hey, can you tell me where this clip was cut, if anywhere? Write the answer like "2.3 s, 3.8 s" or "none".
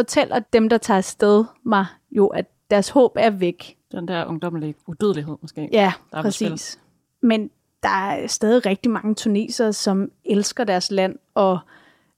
3.9 s